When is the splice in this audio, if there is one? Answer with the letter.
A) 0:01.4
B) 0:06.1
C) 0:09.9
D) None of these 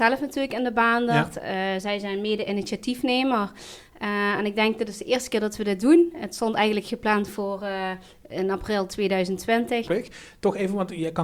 C